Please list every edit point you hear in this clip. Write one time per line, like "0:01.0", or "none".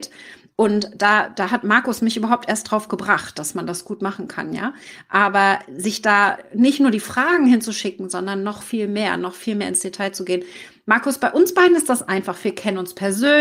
none